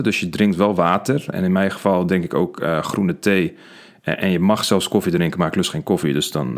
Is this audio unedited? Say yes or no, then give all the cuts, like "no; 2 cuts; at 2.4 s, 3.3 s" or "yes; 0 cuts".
yes; 0 cuts